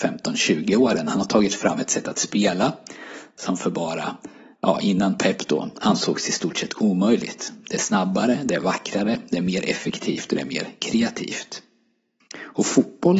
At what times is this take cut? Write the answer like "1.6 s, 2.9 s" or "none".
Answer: none